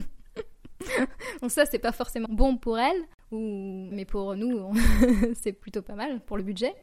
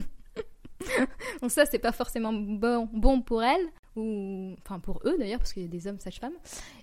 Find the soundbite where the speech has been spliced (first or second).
first